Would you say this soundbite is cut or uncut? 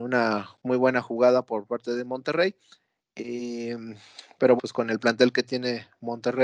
cut